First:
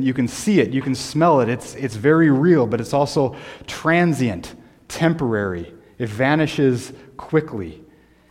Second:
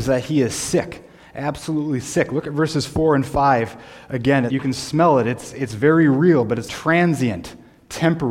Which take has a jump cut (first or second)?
second